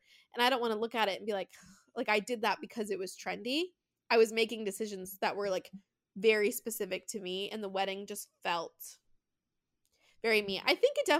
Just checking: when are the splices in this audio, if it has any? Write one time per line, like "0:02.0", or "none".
none